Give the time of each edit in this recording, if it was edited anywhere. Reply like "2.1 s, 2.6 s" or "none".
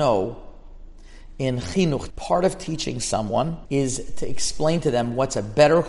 2.1 s, 3.6 s